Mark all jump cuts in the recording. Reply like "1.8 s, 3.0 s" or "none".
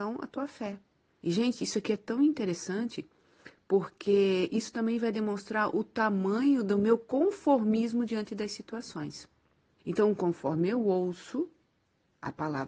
1.2 s, 9.8 s